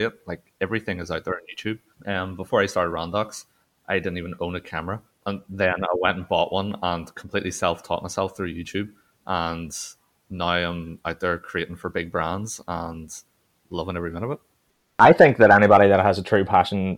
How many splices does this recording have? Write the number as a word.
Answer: zero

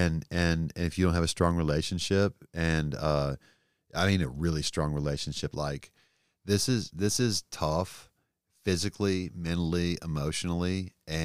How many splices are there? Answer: one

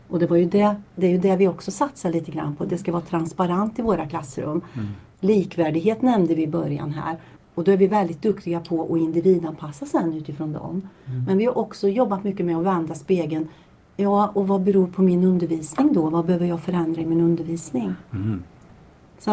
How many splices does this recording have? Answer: one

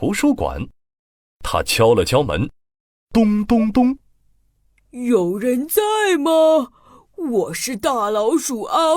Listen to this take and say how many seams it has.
zero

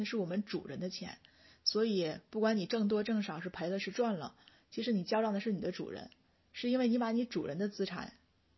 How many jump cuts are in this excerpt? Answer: zero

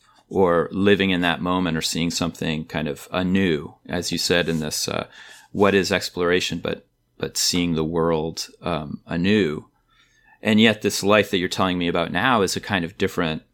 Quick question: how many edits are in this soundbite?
zero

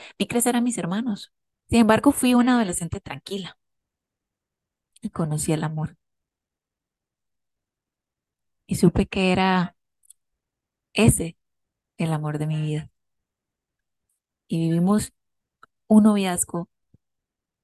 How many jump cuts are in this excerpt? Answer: one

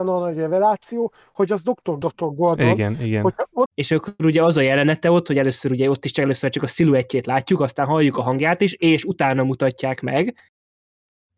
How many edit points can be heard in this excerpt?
two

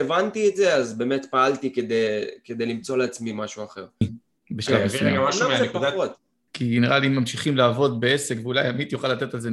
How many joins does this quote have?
two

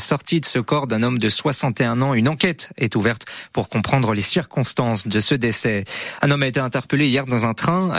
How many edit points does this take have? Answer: one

